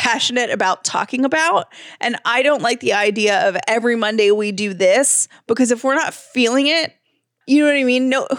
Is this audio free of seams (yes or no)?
no